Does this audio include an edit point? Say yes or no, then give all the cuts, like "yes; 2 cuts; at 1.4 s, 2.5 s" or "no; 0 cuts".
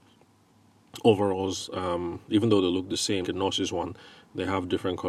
yes; 1 cut; at 3.2 s